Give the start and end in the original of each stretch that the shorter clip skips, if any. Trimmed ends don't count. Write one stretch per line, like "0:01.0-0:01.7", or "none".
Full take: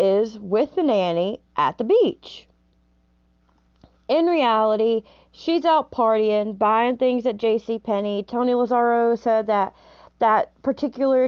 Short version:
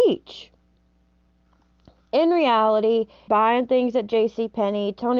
0:05.2-0:06.6